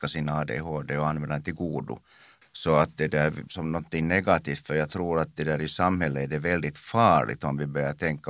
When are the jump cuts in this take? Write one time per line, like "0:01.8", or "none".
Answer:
0:02.4
0:03.5